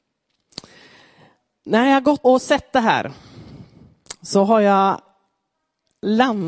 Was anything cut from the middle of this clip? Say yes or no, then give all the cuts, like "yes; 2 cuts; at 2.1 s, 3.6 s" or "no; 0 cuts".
yes; 1 cut; at 2.2 s